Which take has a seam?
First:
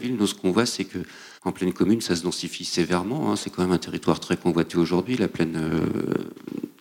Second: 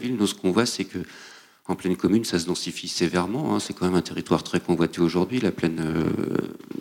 first; 1 cut; at 1.4 s

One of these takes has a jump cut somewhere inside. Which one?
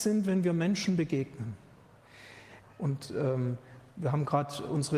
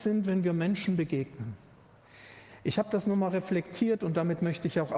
first; 1 cut; at 2.6 s

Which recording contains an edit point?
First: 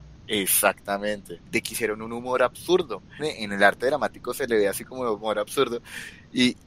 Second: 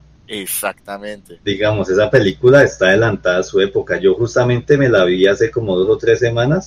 first; 2 cuts; at 1.4 s, 3.2 s

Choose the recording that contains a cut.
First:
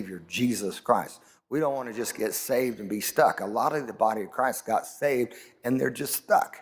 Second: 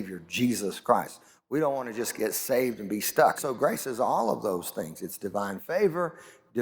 second; 1 cut; at 3.4 s

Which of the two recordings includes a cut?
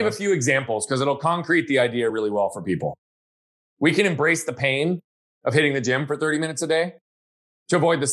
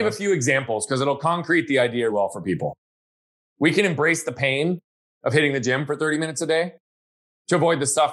second; 1 cut; at 2.1 s

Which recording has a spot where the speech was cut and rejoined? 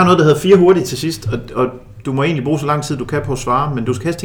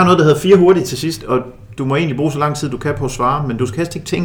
second; 1 cut; at 1.2 s

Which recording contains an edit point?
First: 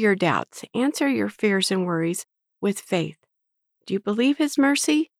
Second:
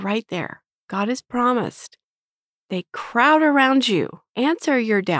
second; 1 cut; at 4.3 s

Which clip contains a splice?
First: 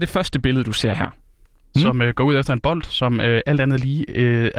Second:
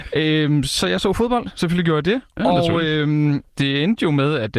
first; 1 cut; at 1.7 s

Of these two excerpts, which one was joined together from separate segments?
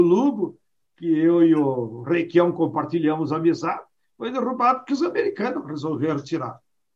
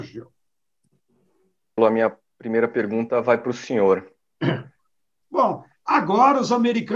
second; 2 cuts; at 1.8 s, 5.2 s

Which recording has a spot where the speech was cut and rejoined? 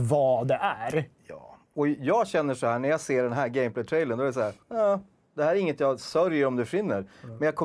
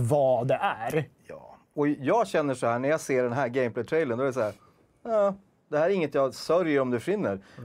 first; 1 cut; at 4.6 s

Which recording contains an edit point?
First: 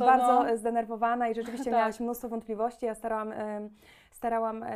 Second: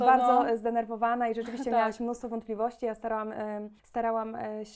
second; 1 cut; at 3.8 s

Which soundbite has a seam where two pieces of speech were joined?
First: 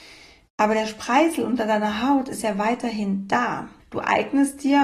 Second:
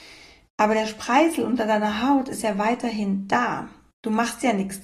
first; 1 cut; at 3.8 s

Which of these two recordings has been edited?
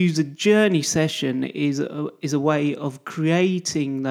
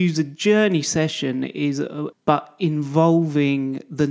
second; 1 cut; at 2.1 s

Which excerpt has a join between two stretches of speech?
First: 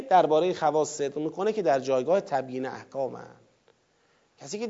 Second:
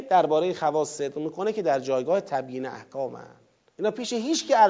second; 1 cut; at 3.7 s

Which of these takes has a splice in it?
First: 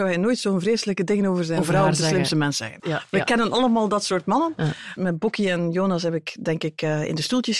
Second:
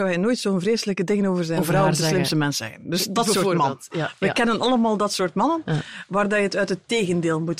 first; 2 cuts; at 2.8 s, 5.0 s

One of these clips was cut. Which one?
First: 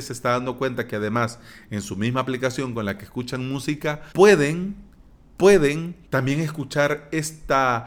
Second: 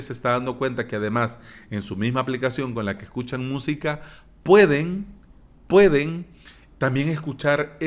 first; 2 cuts; at 4.1 s, 6.1 s

